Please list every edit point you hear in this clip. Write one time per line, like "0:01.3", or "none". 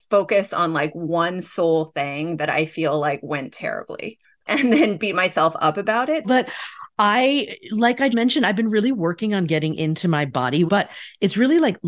0:06.2
0:08.1
0:10.7

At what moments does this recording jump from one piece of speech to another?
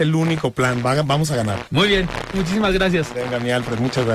0:02.3

